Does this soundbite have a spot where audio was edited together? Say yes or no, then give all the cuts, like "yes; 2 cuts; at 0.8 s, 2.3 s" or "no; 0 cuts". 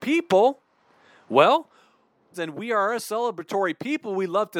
yes; 1 cut; at 2.3 s